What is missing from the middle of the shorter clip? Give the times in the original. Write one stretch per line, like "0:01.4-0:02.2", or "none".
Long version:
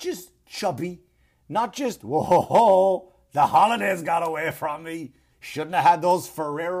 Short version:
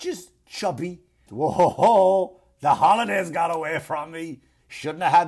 0:01.3-0:02.0